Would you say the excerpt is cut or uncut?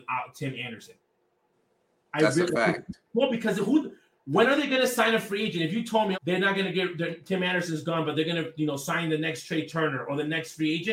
cut